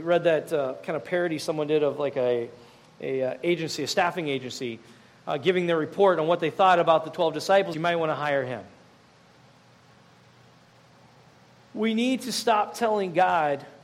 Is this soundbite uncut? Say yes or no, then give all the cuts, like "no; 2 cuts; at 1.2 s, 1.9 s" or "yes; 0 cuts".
no; 1 cut; at 7.7 s